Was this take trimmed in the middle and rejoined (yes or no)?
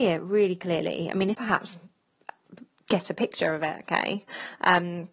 yes